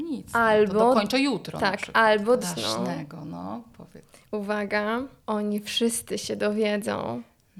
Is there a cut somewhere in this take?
yes; 2 cuts; at 2.4 s, 5.2 s

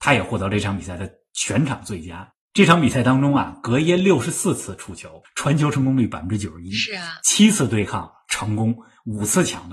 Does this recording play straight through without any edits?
no; 1 cut; at 5.2 s

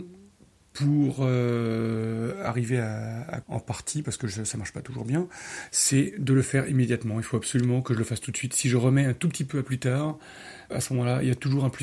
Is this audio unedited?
no; 2 cuts; at 3.4 s, 10.7 s

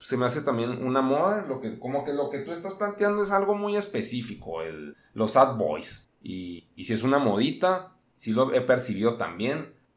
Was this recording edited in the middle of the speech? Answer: no; 0 cuts

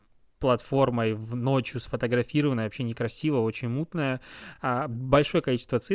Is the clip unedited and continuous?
yes; 0 cuts

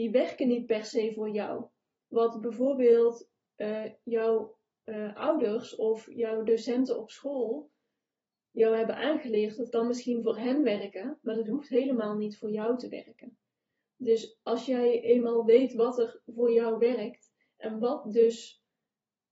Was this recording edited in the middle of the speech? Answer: no; 0 cuts

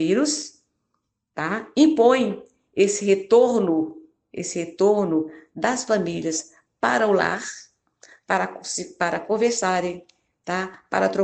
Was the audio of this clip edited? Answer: no; 0 cuts

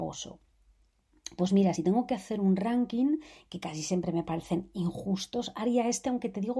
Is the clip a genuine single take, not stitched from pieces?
yes; 0 cuts

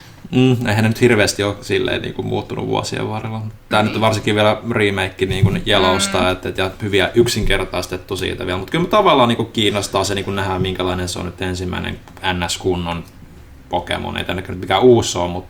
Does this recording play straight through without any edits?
yes; 0 cuts

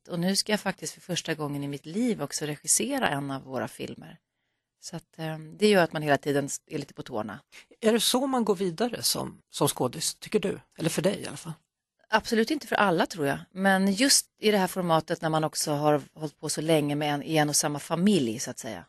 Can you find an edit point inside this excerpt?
no; 0 cuts

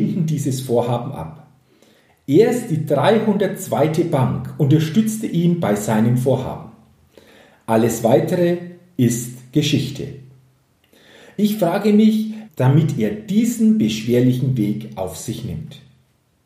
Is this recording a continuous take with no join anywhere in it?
no; 1 cut; at 12.5 s

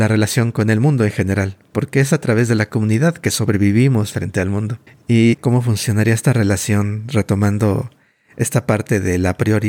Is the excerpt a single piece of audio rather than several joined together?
no; 1 cut; at 5.3 s

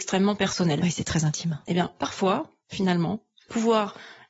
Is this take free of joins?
yes; 0 cuts

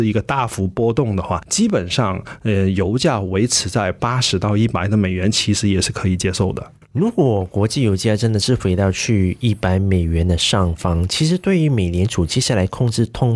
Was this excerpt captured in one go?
yes; 0 cuts

